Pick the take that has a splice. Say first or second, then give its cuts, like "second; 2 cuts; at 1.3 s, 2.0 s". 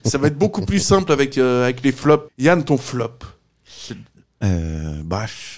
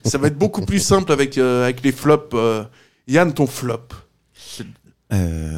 first; 1 cut; at 2.3 s